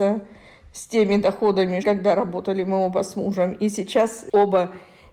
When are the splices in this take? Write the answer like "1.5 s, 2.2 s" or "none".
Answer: 1.8 s